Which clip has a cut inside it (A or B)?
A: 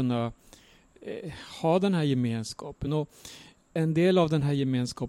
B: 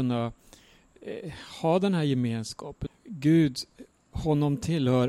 B